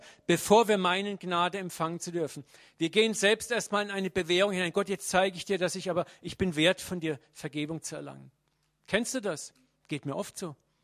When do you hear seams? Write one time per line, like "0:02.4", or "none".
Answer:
none